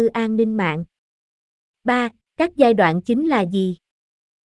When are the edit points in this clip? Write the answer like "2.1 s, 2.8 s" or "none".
2.2 s